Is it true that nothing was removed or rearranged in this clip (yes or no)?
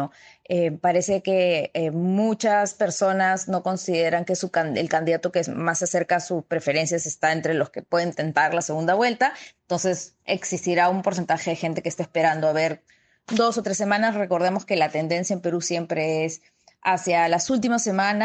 yes